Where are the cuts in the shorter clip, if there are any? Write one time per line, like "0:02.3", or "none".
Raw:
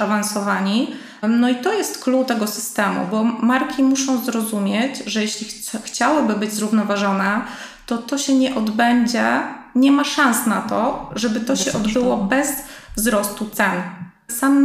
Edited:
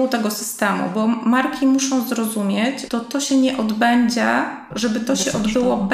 0:02.9
0:04.7